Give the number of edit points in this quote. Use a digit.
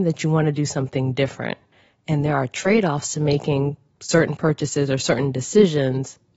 0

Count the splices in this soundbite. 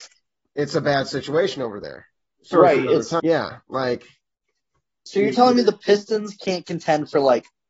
1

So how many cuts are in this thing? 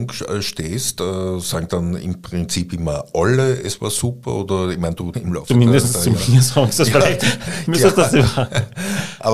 1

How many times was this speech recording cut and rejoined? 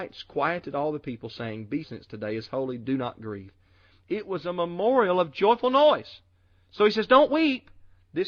2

